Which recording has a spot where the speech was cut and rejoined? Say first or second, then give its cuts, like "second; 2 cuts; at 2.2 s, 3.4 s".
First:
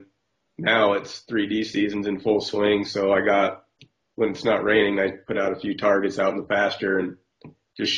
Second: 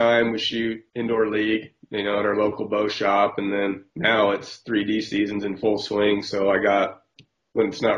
second; 1 cut; at 3.9 s